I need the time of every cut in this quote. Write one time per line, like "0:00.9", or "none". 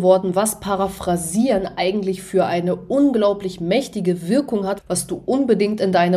0:04.8